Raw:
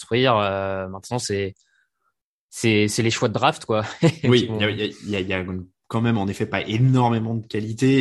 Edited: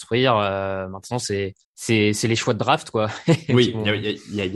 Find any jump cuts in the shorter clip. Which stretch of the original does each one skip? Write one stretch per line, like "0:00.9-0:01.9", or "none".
0:01.6-0:02.4